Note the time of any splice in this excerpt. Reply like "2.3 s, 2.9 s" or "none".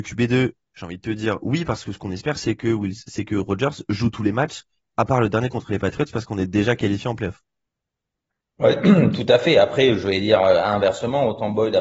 none